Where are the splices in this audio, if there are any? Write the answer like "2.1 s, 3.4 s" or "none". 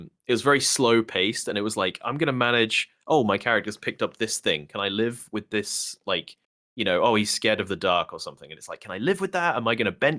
none